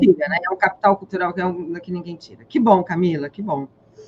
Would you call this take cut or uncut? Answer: uncut